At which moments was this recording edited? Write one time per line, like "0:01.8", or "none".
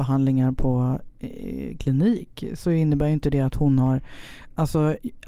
none